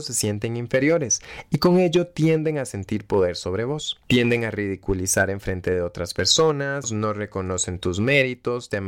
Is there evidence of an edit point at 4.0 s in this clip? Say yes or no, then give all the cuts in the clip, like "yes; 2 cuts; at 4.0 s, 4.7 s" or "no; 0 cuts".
no; 1 cut; at 6.8 s